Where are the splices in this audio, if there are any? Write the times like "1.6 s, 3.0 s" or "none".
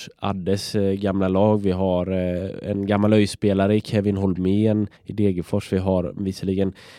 5.0 s